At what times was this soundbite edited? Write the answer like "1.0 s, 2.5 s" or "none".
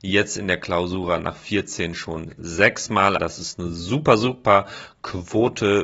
3.2 s